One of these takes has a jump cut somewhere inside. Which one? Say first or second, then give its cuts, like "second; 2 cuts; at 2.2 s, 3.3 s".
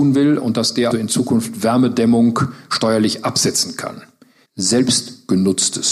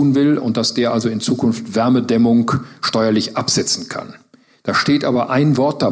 first; 2 cuts; at 0.9 s, 4.5 s